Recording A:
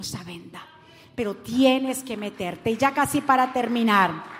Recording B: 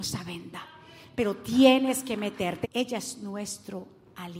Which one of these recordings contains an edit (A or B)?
B